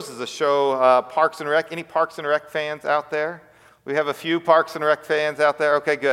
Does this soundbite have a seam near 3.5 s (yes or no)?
no